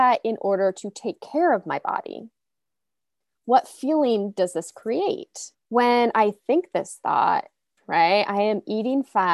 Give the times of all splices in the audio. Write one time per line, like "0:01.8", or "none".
0:05.5
0:07.8